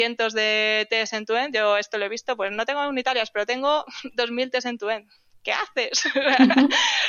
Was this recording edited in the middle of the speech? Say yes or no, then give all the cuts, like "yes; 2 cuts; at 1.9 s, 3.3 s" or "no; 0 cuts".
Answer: no; 0 cuts